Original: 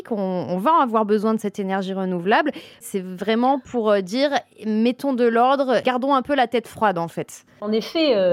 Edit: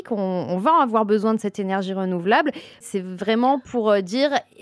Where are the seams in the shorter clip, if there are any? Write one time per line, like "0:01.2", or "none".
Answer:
none